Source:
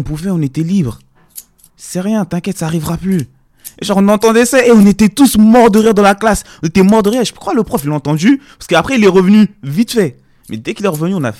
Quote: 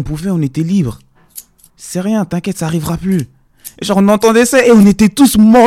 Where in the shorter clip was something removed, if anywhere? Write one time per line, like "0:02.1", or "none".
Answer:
none